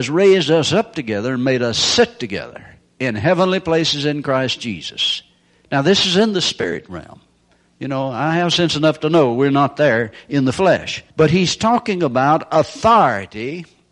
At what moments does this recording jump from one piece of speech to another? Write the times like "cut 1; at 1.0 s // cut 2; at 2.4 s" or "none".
cut 1; at 11.1 s